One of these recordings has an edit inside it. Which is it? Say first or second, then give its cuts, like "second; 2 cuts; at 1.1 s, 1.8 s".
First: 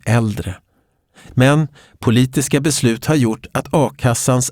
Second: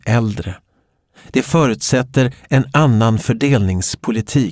first; 1 cut; at 1.3 s